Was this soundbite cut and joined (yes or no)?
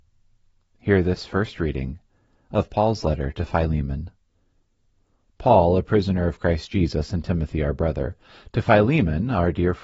no